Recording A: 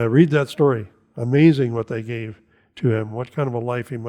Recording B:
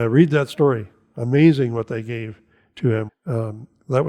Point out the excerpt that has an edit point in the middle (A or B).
B